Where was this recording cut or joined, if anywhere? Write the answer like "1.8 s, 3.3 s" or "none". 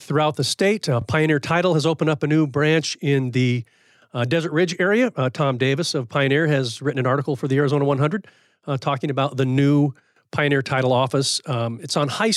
none